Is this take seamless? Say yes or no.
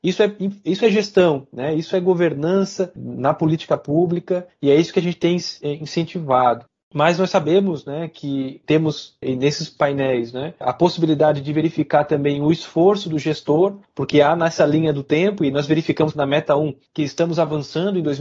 no